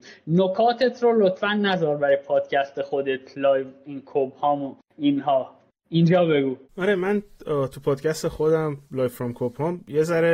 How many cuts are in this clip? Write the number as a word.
one